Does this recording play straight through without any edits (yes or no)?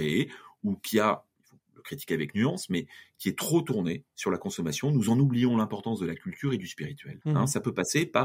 no